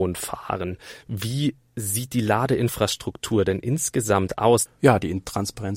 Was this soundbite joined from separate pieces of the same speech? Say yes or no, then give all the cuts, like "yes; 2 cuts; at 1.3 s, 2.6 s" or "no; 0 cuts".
yes; 1 cut; at 4.7 s